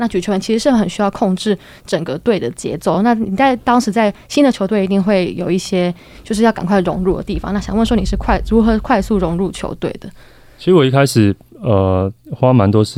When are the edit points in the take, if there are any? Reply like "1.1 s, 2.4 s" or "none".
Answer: none